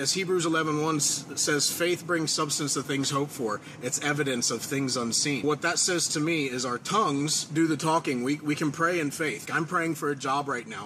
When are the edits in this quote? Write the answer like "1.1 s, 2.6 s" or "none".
5.4 s, 9.5 s